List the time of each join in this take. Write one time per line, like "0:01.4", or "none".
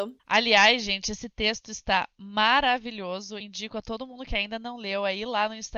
none